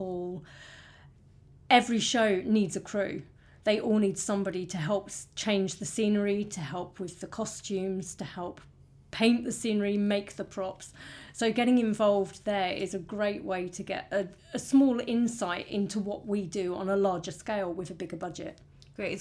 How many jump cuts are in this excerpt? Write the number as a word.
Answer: zero